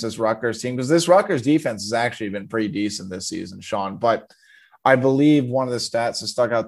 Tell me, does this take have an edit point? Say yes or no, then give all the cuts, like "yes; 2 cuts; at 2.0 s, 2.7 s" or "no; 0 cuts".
no; 0 cuts